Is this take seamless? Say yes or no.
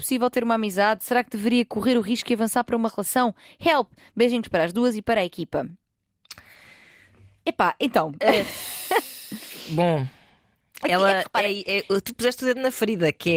yes